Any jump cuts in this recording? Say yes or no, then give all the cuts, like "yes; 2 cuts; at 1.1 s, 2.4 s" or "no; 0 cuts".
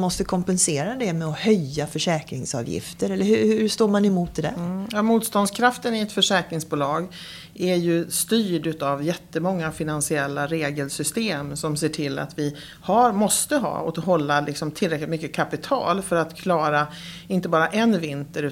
no; 0 cuts